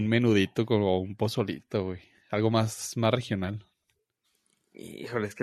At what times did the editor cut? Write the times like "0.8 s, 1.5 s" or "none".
none